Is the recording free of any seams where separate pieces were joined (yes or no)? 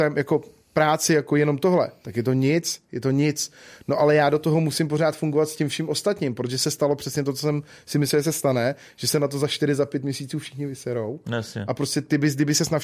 yes